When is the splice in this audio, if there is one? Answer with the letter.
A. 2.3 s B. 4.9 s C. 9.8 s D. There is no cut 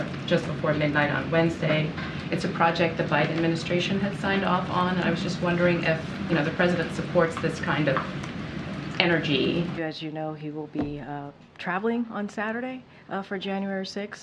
C